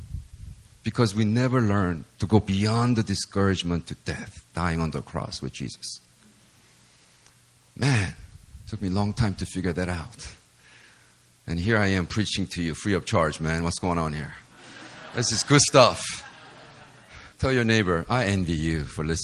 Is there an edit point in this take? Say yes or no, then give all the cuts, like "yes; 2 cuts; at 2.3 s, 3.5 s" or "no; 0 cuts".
yes; 1 cut; at 17.3 s